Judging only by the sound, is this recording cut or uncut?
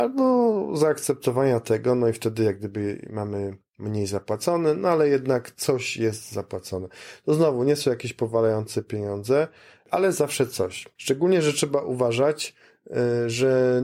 cut